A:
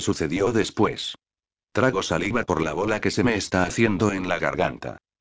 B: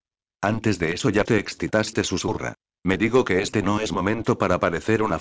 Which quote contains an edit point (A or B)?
B